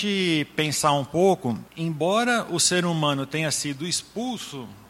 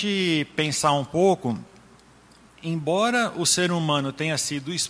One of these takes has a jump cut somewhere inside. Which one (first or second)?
first